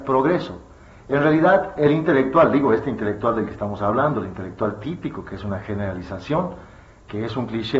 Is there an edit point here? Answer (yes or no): no